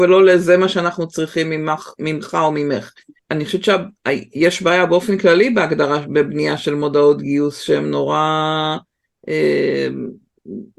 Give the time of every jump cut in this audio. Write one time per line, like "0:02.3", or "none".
0:03.2